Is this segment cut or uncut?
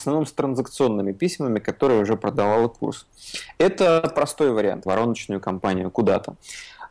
cut